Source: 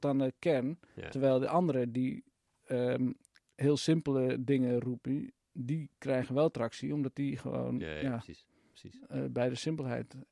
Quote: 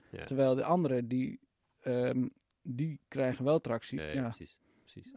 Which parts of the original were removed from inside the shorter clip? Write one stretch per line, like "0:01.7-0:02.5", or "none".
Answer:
0:03.3-0:05.4
0:06.9-0:07.9

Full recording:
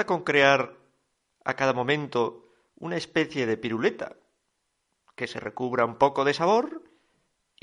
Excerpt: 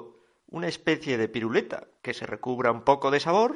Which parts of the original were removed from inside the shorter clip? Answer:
0:04.3-0:05.1

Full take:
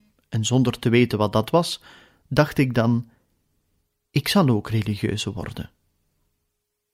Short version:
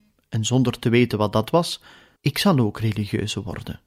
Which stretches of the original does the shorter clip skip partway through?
0:02.2-0:04.1

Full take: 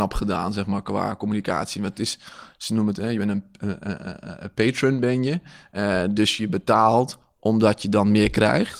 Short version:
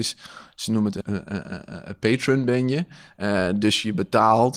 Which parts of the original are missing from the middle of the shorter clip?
0:03.0-0:03.6

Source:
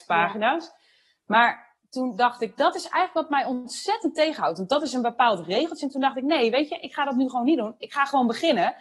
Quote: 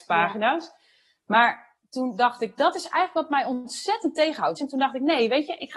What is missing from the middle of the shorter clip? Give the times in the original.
0:04.6-0:05.8

